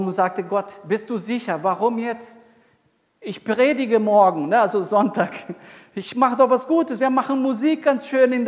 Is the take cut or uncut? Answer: uncut